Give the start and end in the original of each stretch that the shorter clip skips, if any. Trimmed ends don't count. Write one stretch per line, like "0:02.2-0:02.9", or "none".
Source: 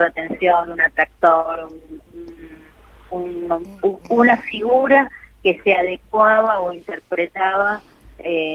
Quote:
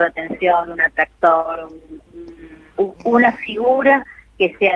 0:02.7-0:03.8